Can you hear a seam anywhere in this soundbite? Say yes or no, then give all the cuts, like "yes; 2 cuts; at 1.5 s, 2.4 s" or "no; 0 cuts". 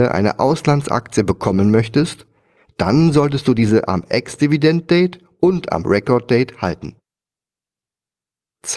no; 0 cuts